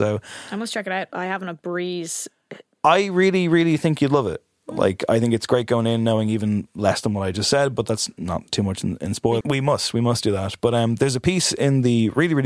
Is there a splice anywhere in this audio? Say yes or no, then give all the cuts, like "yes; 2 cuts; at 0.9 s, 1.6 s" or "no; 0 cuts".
yes; 1 cut; at 9.4 s